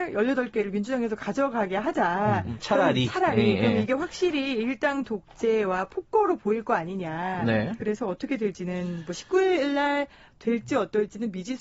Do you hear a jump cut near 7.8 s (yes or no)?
yes